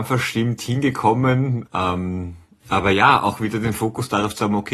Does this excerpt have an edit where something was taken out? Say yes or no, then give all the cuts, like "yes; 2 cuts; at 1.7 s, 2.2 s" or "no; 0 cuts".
yes; 1 cut; at 1.7 s